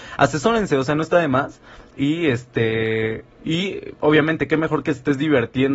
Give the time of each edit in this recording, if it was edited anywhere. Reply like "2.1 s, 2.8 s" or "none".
3.4 s